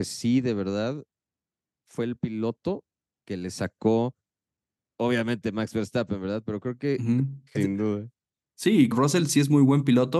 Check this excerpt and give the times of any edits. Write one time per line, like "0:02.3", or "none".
0:07.5
0:08.9